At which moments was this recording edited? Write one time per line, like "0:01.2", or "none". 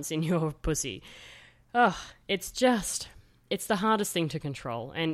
none